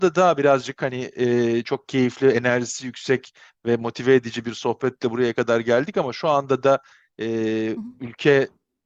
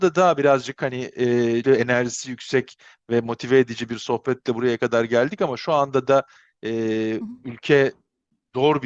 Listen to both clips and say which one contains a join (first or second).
second